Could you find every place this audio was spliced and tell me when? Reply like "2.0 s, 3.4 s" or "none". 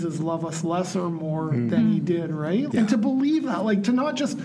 2.7 s